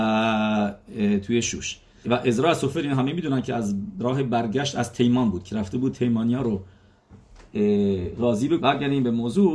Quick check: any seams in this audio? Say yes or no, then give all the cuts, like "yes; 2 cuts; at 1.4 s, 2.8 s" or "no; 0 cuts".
yes; 2 cuts; at 2.0 s, 8.6 s